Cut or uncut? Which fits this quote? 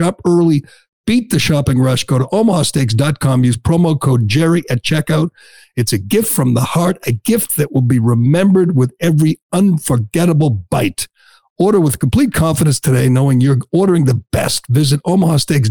uncut